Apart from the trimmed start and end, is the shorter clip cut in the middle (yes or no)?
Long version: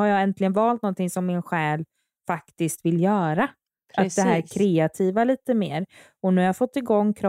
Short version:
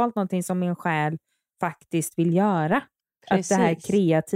no